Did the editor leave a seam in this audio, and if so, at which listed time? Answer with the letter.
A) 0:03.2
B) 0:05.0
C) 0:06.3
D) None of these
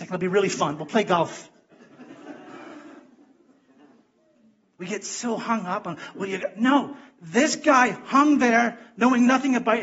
D